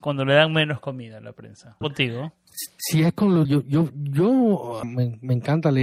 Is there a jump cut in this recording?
yes; 3 cuts; at 1.8 s, 3.4 s, 4.8 s

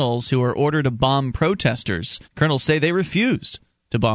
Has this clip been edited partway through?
yes; 1 cut; at 2.2 s

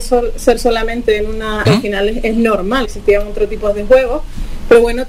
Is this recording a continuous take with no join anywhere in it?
no; 2 cuts; at 1.7 s, 2.8 s

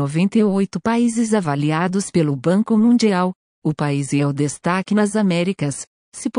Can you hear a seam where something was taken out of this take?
no; 0 cuts

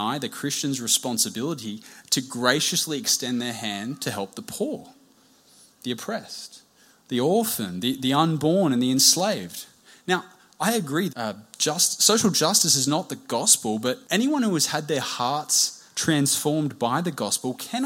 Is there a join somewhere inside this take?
yes; 2 cuts; at 11.1 s, 14.0 s

